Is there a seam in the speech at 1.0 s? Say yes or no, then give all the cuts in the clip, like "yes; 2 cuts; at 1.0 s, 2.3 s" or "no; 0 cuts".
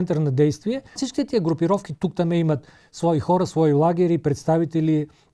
yes; 1 cut; at 1.0 s